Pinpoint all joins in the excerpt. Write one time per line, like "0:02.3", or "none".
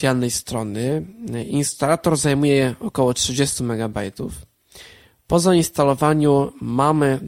none